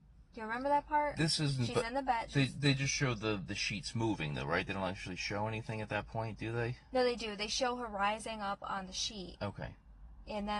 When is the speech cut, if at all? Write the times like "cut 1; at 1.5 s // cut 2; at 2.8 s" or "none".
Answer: none